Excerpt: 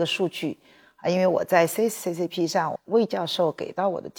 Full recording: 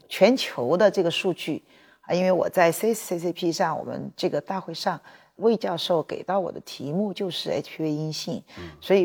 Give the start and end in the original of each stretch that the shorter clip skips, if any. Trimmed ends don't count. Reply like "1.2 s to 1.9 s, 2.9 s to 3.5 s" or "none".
3.8 s to 5.3 s